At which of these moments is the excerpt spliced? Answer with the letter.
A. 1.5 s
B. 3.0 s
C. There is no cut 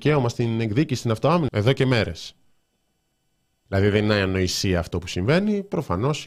A